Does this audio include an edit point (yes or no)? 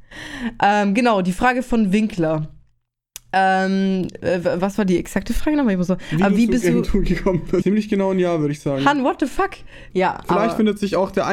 yes